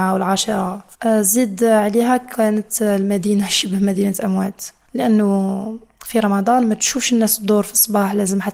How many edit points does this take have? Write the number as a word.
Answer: one